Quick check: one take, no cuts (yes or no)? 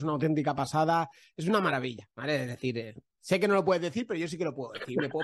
yes